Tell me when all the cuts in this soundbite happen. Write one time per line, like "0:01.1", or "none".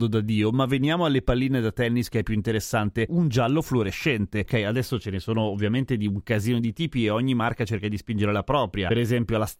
0:03.1
0:04.5